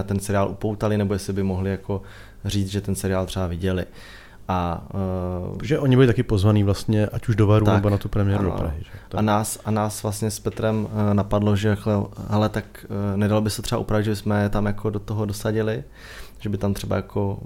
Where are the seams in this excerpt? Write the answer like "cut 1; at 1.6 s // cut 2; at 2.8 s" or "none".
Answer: none